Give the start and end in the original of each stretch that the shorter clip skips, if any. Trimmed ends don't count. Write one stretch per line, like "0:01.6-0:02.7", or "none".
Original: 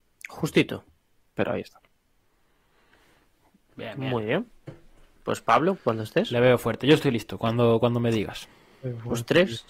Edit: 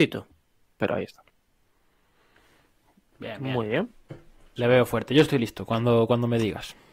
0:05.1-0:06.3